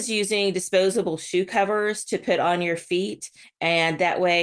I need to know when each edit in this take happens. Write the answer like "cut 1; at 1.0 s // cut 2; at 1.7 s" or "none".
cut 1; at 3.4 s

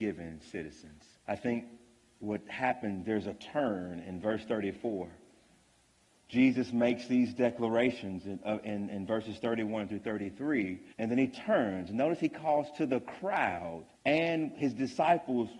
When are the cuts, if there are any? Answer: cut 1; at 1.2 s // cut 2; at 10.9 s // cut 3; at 13.9 s

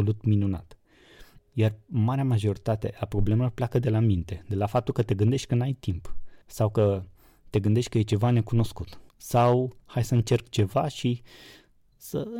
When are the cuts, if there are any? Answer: cut 1; at 1.4 s // cut 2; at 6.4 s // cut 3; at 9.1 s

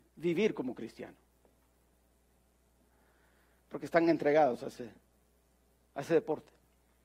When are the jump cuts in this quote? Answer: cut 1; at 3.6 s

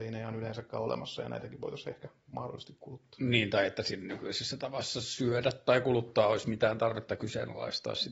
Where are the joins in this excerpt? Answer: none

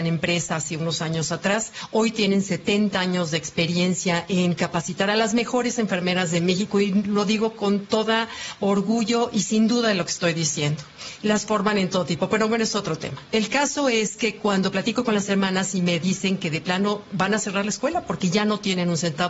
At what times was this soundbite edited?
none

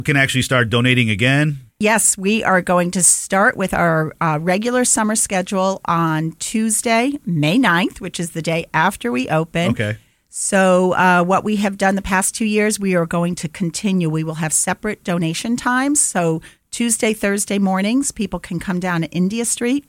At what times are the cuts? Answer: none

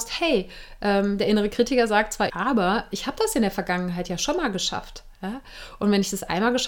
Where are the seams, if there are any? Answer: cut 1; at 2.3 s

